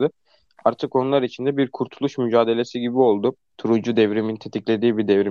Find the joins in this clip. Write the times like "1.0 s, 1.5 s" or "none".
3.6 s